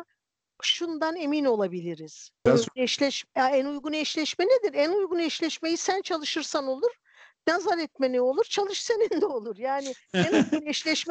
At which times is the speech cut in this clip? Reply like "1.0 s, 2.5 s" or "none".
2.5 s